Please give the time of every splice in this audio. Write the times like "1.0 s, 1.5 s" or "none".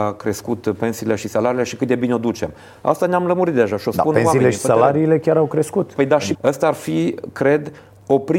6.3 s